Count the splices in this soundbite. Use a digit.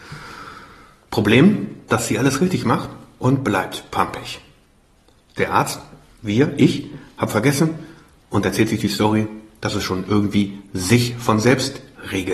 1